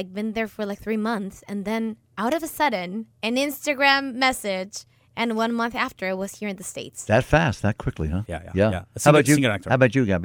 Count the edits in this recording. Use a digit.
2